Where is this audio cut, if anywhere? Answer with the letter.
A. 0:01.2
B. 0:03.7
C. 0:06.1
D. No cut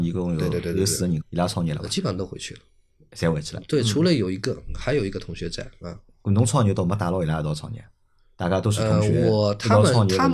A